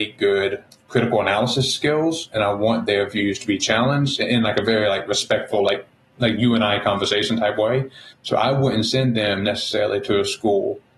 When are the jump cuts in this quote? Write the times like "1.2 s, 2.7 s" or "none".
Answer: none

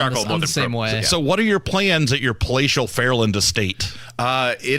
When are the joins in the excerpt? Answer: none

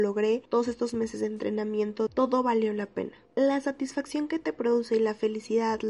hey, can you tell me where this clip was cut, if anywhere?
3.3 s

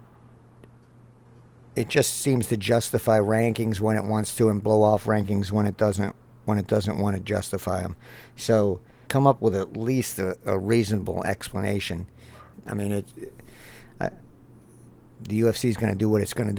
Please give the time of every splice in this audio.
9.1 s, 12.5 s

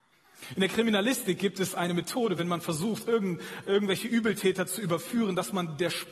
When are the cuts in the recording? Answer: none

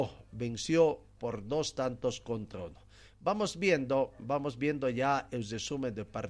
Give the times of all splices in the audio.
none

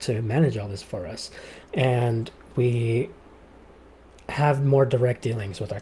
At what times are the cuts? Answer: 1.7 s

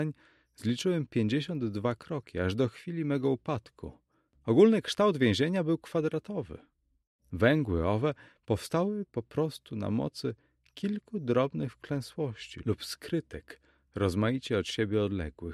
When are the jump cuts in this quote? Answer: 4.3 s, 7.2 s

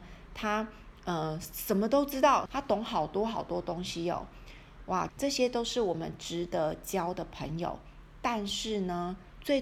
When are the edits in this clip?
2.5 s, 5.1 s

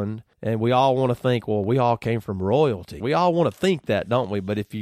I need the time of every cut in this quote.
3.0 s

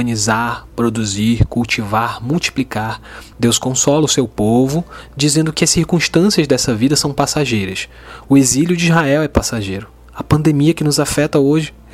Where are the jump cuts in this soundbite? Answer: 3.3 s, 8.2 s

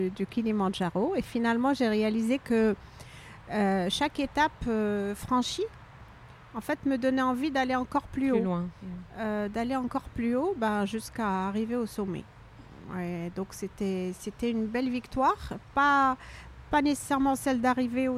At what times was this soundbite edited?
none

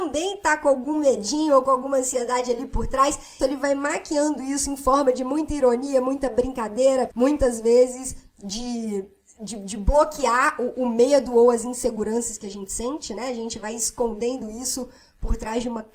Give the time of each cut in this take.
3.4 s, 7.1 s

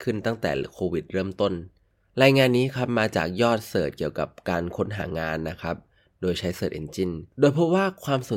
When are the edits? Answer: 7.3 s

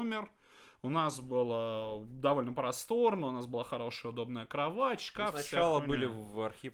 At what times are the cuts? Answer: none

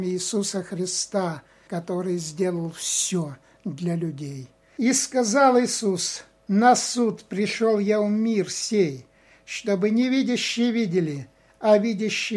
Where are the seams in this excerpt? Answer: none

